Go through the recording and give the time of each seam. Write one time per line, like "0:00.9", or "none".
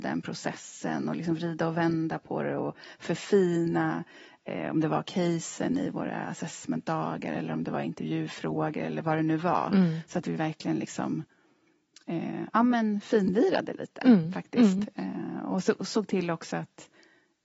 none